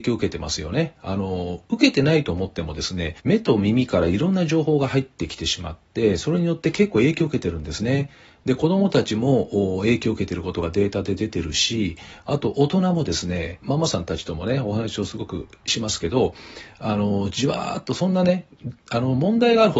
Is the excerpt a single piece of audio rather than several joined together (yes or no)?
no